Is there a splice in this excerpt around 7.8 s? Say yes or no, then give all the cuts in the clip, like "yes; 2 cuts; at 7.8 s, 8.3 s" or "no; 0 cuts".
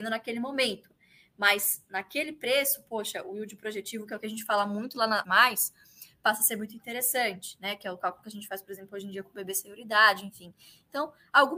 no; 1 cut; at 5.2 s